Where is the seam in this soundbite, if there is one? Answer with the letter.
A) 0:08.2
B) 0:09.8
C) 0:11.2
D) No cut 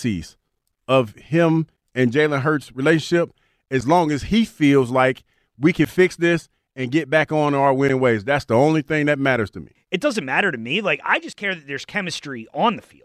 B